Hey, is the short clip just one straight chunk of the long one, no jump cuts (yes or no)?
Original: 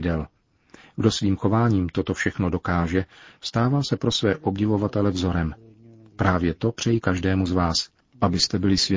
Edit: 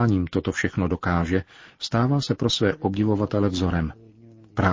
yes